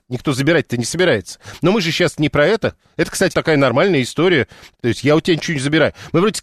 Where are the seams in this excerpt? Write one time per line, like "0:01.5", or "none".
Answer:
0:03.3
0:04.8